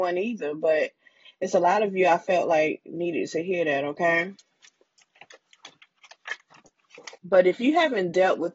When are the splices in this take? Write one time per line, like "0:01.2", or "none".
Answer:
0:07.2